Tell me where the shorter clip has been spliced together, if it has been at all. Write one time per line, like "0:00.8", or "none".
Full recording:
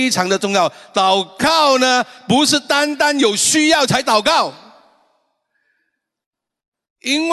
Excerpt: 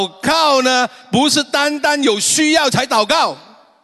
none